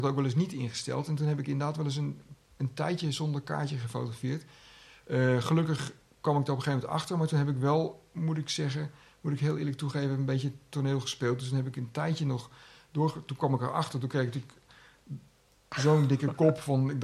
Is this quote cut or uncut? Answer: uncut